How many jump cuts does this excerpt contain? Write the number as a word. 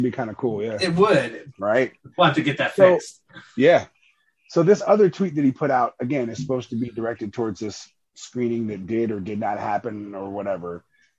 one